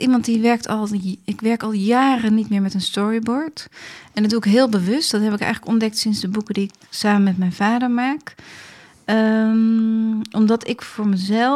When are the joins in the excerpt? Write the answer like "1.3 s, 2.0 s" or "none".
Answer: none